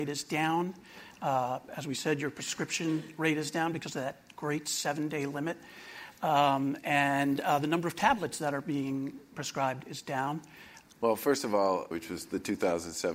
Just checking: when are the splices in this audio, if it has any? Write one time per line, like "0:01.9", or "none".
0:10.8
0:11.9

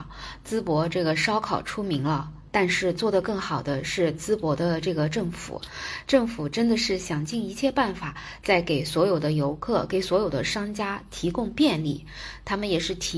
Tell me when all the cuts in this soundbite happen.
none

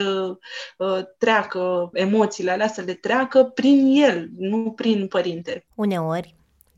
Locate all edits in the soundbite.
0:01.9
0:05.7

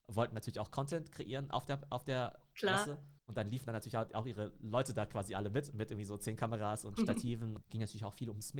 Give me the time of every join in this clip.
0:03.2
0:07.6

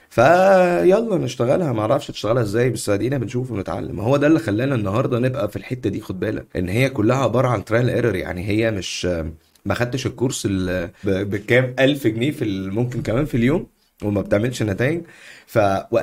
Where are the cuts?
0:06.5
0:11.0

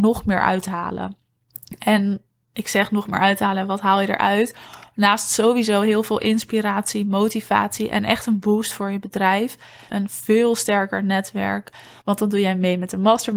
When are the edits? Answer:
0:09.9
0:12.0

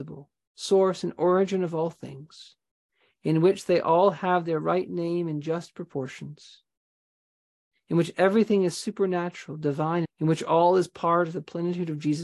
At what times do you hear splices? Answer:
0:10.0

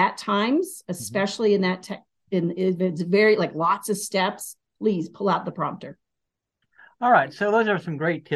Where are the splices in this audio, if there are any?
none

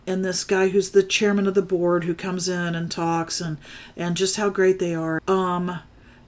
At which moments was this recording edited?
0:05.2

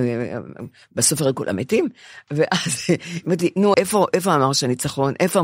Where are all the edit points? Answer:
0:03.7

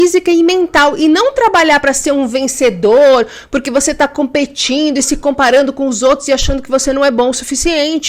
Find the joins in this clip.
none

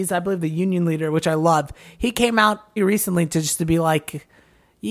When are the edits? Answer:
0:02.8

